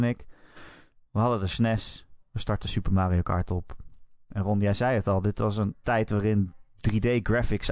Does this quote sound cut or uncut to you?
uncut